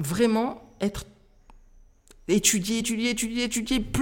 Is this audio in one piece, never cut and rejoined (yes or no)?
no